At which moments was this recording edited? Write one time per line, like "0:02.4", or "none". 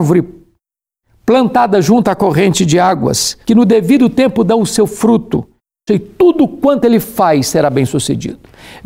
0:03.4
0:05.9